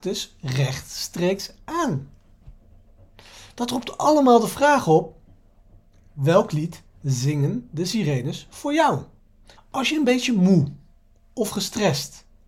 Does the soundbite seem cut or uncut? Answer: cut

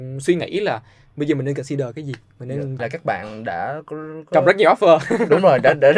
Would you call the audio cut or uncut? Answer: cut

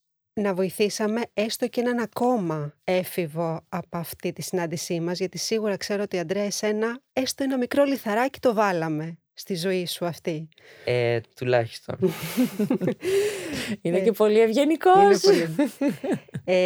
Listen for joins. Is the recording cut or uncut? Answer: cut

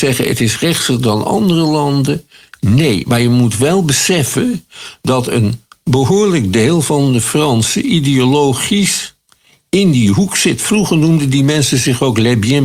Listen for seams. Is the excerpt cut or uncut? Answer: uncut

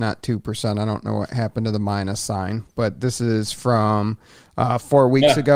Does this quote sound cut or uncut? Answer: uncut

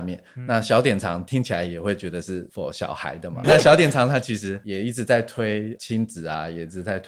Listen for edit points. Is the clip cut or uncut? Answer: cut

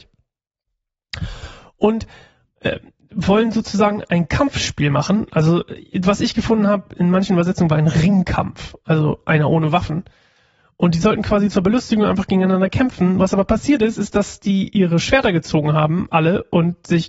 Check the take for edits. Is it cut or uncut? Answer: uncut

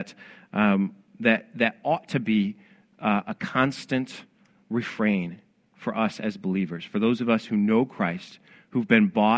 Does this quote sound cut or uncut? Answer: uncut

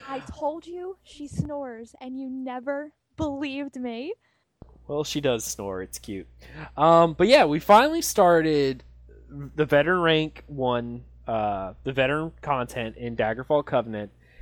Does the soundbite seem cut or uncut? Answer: uncut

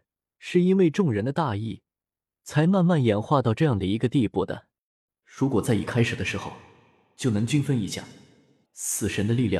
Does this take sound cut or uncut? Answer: cut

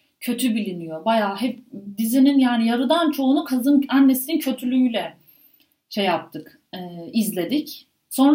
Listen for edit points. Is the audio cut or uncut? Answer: uncut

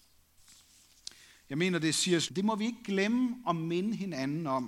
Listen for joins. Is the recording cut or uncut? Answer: cut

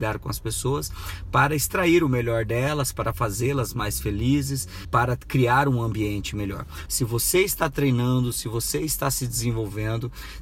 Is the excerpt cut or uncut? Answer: cut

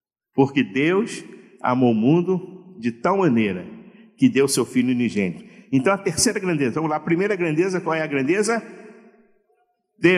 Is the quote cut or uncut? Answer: uncut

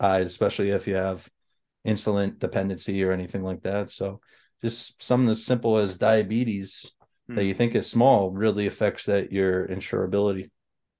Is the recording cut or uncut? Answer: uncut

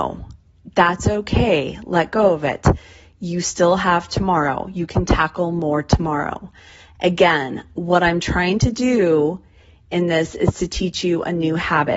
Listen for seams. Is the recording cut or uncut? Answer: uncut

